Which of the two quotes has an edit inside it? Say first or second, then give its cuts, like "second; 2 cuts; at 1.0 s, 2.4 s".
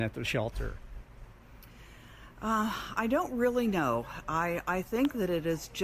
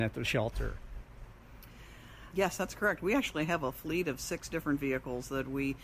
second; 1 cut; at 2.3 s